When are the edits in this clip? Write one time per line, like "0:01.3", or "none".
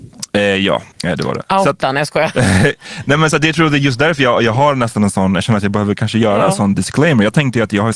0:00.9